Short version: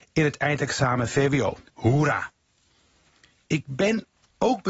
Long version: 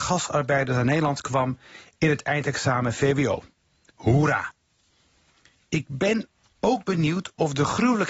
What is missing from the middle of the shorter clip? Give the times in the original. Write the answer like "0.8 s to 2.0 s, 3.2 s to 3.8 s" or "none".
3.5 s to 3.9 s